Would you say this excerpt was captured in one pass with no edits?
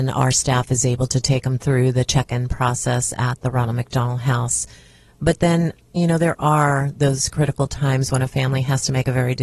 no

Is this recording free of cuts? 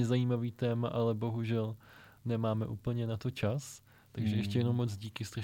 yes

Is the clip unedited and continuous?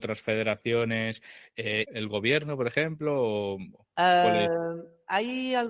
no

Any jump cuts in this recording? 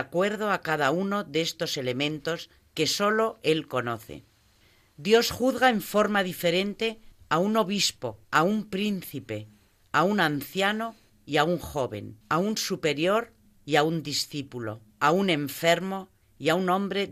yes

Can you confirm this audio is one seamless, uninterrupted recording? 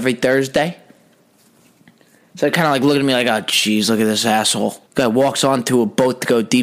no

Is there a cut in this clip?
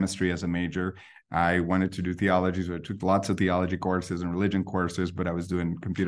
no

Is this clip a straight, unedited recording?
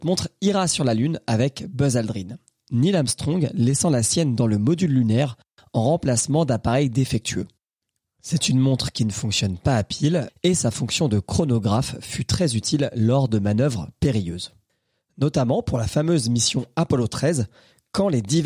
no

